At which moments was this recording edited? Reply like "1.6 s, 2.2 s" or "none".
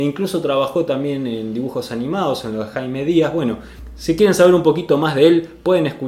none